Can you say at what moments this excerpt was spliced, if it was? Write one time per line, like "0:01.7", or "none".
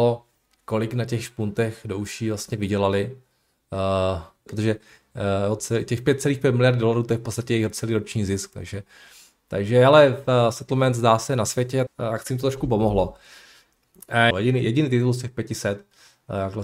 0:04.5
0:11.9
0:14.3